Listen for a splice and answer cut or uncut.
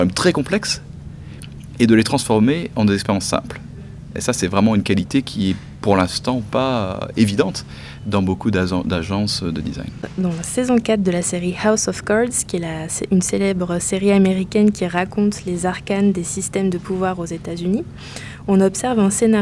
uncut